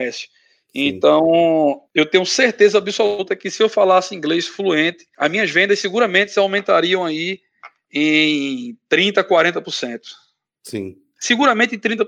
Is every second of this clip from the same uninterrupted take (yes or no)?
yes